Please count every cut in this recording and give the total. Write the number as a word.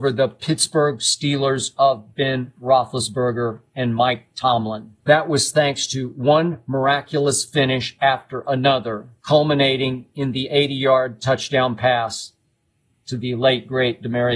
two